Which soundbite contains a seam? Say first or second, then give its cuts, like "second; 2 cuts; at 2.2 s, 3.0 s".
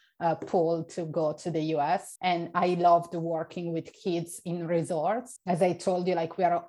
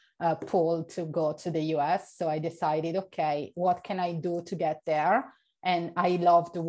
first; 2 cuts; at 2.2 s, 5.4 s